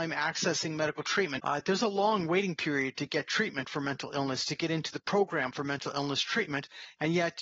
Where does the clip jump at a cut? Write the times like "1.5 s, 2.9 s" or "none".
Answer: 1.4 s